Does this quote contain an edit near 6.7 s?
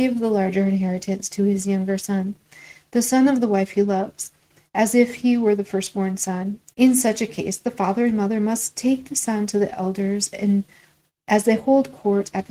yes; 1 cut; at 6.7 s

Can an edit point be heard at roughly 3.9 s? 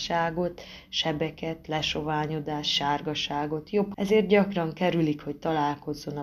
yes; 1 cut; at 3.9 s

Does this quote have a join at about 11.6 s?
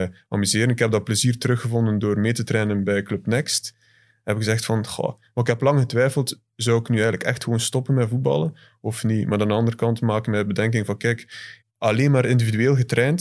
yes; 1 cut; at 11.6 s

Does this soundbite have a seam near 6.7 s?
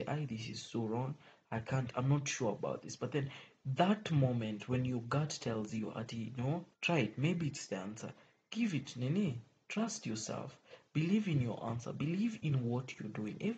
yes; 1 cut; at 6.7 s

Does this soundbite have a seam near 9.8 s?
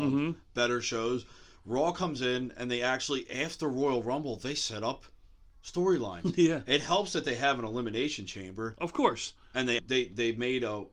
yes; 1 cut; at 9.8 s

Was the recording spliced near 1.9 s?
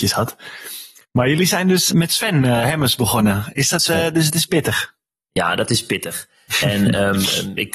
yes; 1 cut; at 1.9 s

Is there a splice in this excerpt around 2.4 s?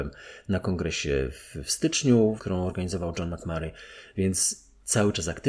yes; 1 cut; at 2.4 s

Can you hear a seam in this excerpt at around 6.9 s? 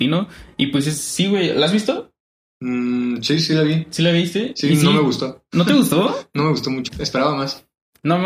yes; 1 cut; at 6.9 s

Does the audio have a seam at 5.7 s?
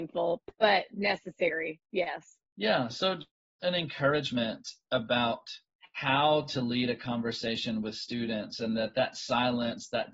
no; 1 cut; at 3.6 s

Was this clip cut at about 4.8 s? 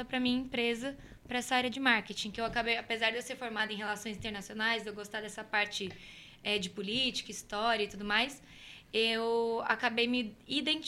no; 0 cuts

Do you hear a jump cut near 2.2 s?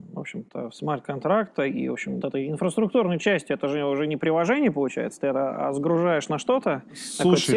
yes; 1 cut; at 2.2 s

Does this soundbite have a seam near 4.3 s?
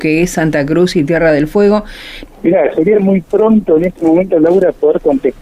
no; 1 cut; at 2.3 s

